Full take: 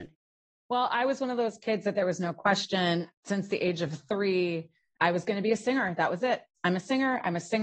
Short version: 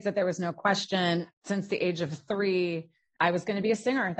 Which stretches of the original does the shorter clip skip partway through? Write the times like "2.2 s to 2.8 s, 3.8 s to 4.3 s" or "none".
none